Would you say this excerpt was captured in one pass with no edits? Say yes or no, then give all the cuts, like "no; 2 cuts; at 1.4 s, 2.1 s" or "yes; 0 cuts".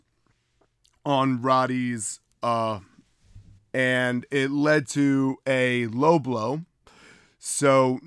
no; 1 cut; at 3.6 s